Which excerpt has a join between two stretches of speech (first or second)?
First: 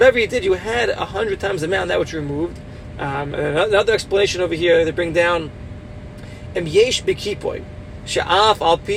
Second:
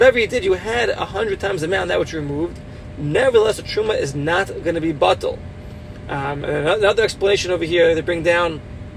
first